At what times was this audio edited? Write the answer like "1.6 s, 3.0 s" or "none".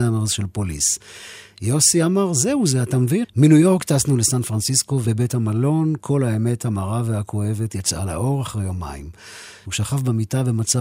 3.2 s, 5.0 s, 9.6 s